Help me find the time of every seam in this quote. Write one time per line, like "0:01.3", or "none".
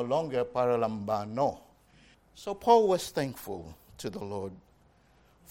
0:02.1